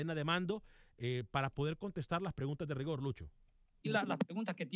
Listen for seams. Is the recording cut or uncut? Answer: cut